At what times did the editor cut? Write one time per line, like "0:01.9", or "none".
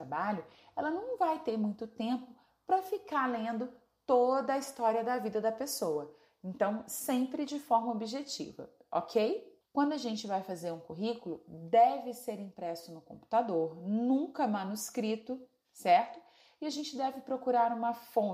0:09.6